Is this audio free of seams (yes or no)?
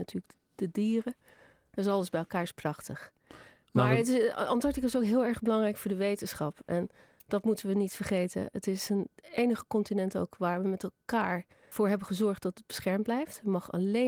yes